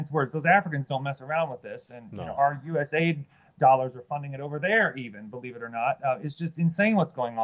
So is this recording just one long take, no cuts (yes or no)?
yes